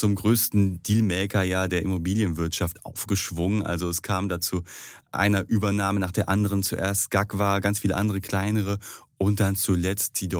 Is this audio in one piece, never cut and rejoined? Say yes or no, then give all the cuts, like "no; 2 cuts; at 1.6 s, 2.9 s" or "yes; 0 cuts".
no; 1 cut; at 5.1 s